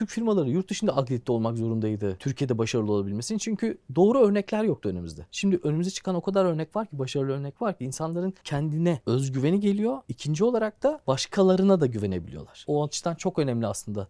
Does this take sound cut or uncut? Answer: uncut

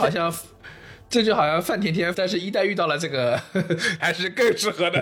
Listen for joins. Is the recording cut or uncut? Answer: cut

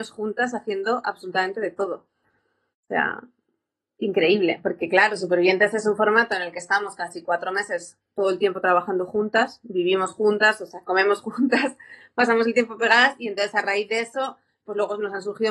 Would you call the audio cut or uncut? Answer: uncut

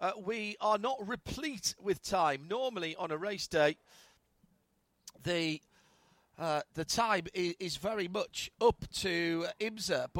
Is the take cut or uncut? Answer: uncut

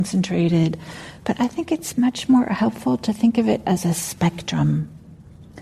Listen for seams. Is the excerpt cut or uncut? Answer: uncut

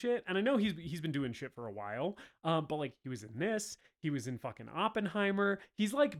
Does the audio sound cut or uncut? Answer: uncut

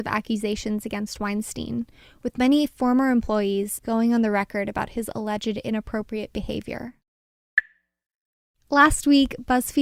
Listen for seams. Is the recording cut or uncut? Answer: cut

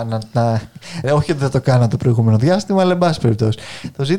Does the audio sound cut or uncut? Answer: cut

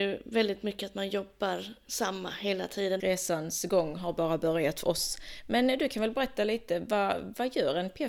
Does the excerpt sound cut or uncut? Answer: cut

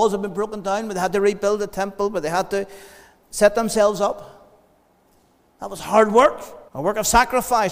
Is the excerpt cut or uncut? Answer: cut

